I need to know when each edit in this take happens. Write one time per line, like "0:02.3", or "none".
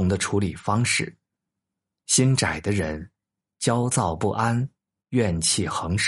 none